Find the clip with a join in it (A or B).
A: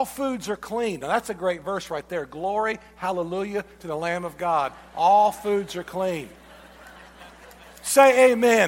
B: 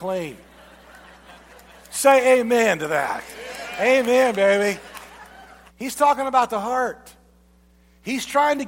B